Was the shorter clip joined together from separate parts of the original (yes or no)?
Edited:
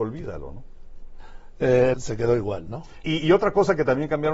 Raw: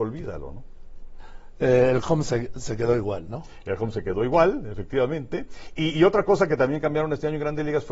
yes